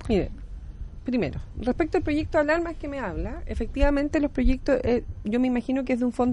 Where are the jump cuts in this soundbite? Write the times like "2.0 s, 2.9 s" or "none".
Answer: none